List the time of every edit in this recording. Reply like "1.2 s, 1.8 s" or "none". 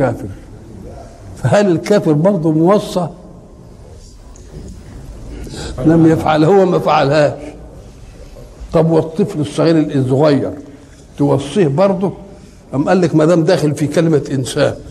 5.8 s

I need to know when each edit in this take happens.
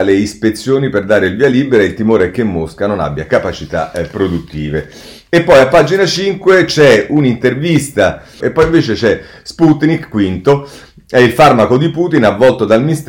8.4 s

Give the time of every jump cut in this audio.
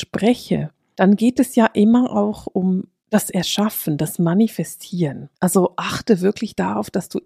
5.4 s

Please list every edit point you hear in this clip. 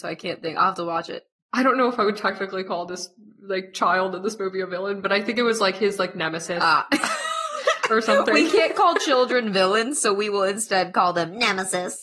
none

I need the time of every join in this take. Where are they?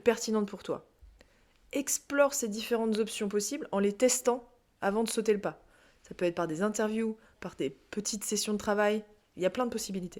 7.4 s

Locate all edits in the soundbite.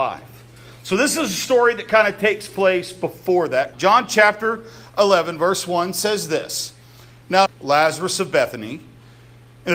3.7 s, 7.5 s

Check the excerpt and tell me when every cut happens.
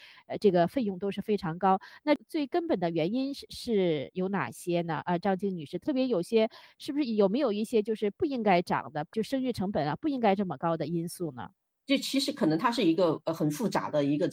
none

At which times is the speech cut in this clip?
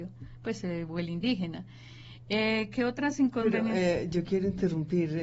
none

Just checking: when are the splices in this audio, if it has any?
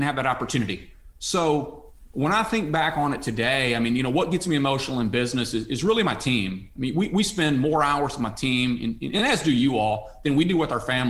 none

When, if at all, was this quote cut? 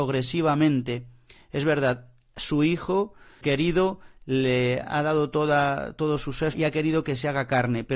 3.4 s, 6.5 s

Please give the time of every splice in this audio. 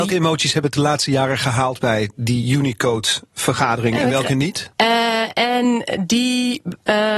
4.7 s

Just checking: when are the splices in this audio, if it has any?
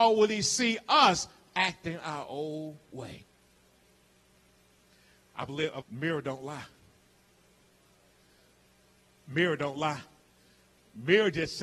5.8 s

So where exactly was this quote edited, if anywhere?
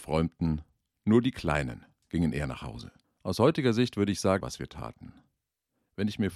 4.4 s

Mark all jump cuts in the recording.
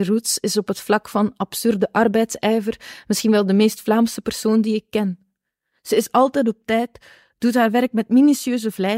none

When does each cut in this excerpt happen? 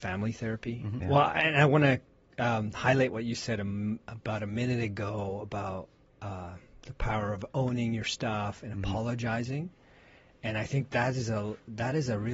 1.0 s

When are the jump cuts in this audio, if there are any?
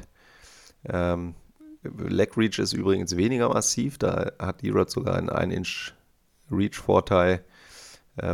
none

